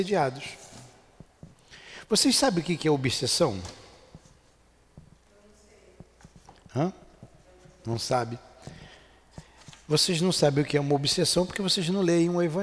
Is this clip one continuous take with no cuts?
yes; 0 cuts

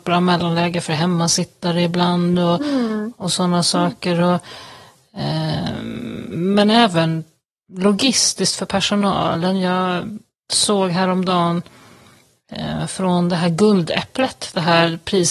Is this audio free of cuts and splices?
yes; 0 cuts

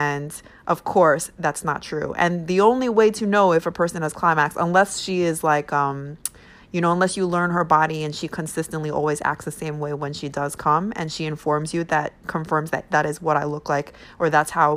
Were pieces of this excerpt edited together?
yes; 1 cut; at 12.9 s

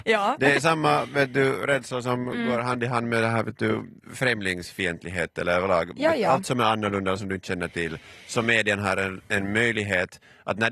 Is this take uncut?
yes; 0 cuts

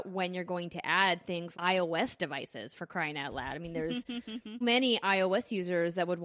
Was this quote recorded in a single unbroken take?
no; 2 cuts; at 1.5 s, 4.6 s

